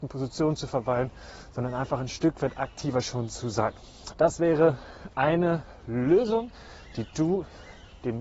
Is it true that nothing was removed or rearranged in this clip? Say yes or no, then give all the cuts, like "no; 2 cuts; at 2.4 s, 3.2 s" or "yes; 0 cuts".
no; 1 cut; at 4.1 s